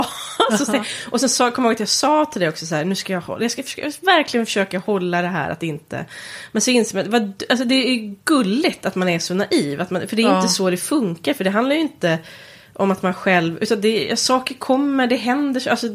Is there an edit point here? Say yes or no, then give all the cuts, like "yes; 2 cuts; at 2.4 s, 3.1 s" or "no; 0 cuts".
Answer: no; 0 cuts